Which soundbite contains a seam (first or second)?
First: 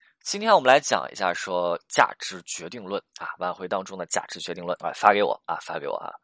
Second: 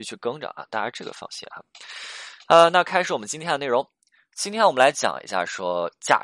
first